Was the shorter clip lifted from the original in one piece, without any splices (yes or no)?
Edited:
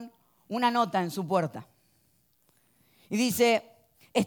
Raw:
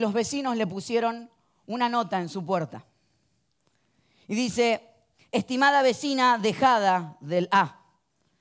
yes